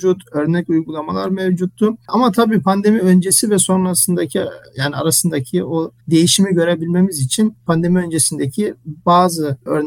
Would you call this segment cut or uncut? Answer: cut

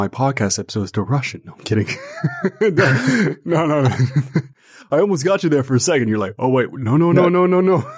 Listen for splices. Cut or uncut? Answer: uncut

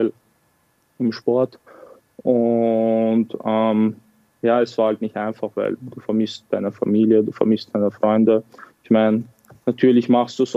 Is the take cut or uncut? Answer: uncut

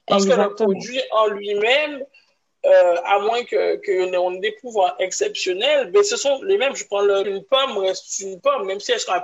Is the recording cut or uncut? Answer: cut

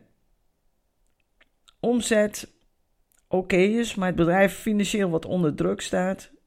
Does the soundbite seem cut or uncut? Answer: uncut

